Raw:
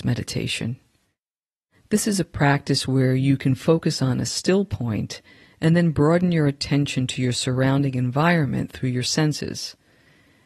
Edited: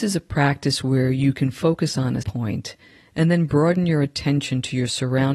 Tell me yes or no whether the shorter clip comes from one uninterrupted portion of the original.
no